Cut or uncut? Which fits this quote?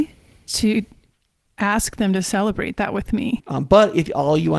cut